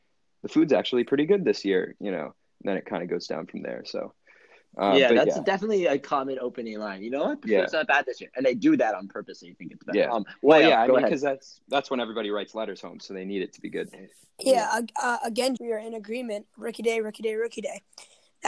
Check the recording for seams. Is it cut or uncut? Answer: cut